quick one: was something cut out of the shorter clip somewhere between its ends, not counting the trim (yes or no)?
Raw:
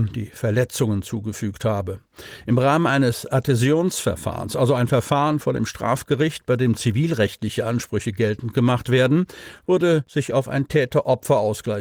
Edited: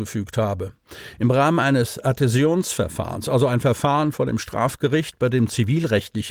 no